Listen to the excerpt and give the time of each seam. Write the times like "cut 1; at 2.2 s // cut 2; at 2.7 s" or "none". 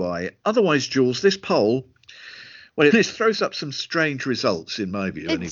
cut 1; at 2.9 s